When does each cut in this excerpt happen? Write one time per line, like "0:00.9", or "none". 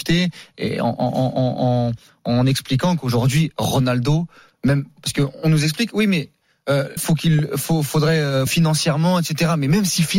0:07.0
0:08.5